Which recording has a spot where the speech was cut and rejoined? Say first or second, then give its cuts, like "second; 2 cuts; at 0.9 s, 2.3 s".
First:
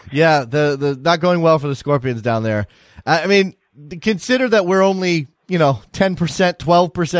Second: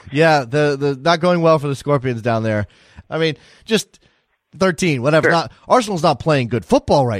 second; 2 cuts; at 3.0 s, 5.2 s